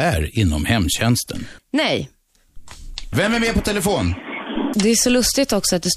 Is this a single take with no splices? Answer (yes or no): no